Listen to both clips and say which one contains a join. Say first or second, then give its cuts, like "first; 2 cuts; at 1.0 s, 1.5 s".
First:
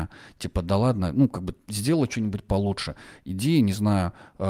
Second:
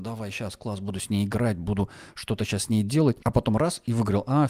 second; 1 cut; at 3.2 s